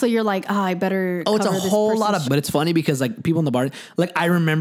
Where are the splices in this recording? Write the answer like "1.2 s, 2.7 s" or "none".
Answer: 2.2 s